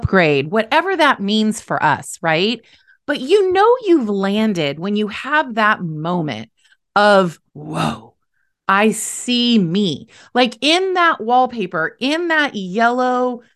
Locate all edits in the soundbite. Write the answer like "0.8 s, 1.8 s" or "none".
7.5 s